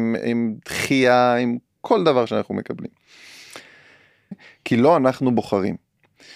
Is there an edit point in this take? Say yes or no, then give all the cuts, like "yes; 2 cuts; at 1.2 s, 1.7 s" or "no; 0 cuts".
yes; 1 cut; at 4.3 s